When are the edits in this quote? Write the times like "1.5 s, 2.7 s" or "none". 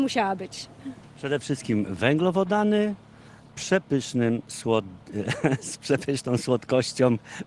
1.1 s, 3.5 s